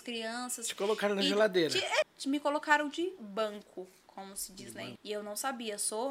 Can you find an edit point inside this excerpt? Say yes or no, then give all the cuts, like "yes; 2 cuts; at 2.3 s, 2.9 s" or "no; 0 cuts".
yes; 2 cuts; at 2.0 s, 5.0 s